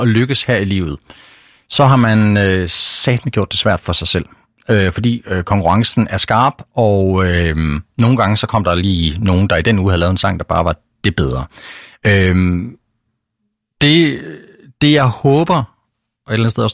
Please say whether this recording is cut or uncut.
uncut